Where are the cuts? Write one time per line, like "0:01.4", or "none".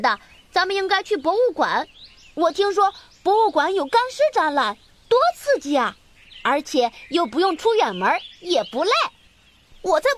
none